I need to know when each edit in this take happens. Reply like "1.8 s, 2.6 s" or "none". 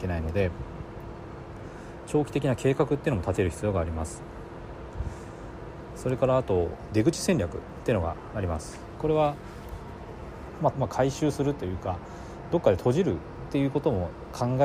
10.7 s